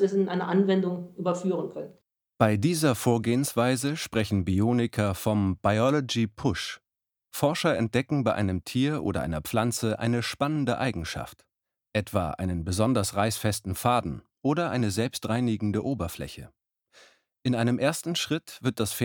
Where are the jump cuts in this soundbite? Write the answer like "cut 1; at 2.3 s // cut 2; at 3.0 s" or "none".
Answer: none